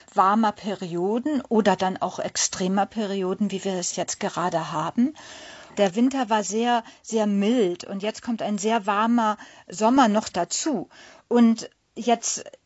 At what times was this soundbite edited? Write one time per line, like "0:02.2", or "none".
none